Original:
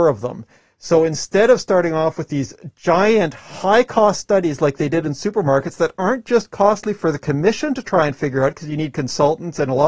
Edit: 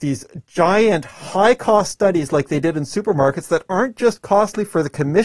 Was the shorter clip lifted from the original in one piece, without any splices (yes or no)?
yes